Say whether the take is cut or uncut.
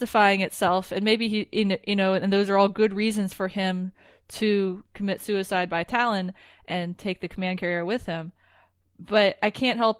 uncut